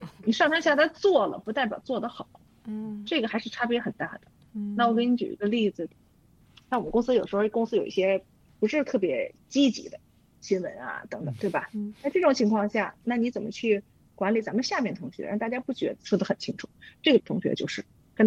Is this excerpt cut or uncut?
cut